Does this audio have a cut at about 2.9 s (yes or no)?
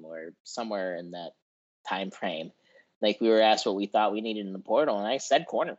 no